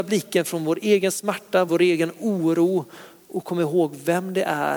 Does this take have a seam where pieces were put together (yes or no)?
yes